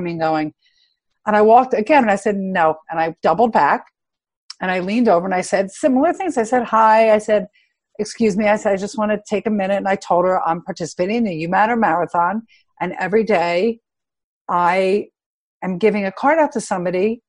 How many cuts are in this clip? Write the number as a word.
one